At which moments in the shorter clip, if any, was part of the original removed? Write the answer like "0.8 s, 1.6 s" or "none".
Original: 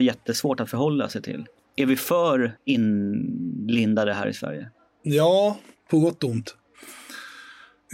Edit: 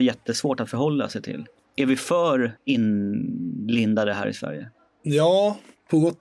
none